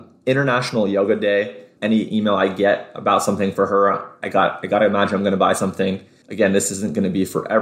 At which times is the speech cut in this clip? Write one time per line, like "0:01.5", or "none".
0:01.8
0:06.2

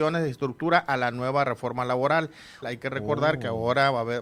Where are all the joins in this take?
0:02.6

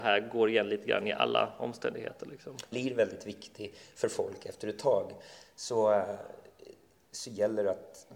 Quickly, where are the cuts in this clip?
0:02.7

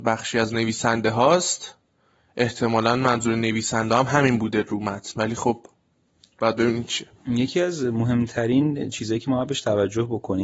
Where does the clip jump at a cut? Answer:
0:07.2

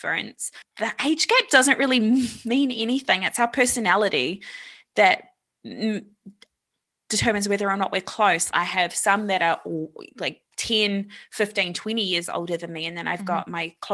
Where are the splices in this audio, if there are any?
0:08.5

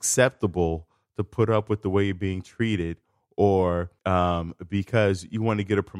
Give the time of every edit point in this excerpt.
0:04.0

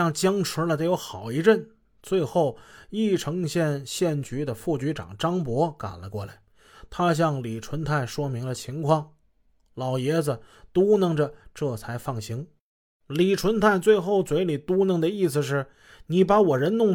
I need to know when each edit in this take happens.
none

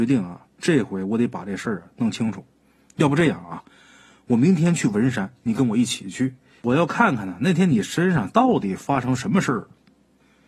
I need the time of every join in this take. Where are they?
none

